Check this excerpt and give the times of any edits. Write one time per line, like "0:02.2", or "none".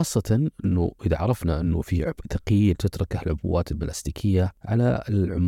none